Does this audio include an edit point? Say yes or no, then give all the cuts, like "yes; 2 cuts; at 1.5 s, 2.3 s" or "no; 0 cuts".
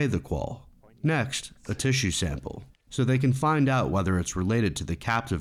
no; 0 cuts